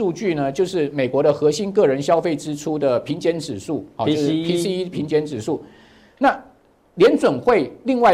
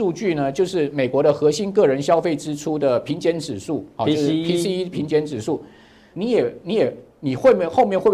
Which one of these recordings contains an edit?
second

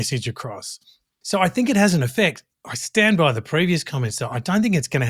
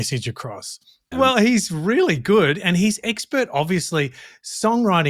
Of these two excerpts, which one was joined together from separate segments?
second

